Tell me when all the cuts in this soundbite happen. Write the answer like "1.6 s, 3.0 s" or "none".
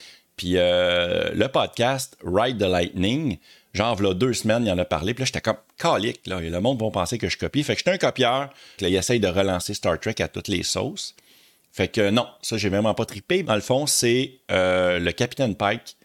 8.8 s, 13.4 s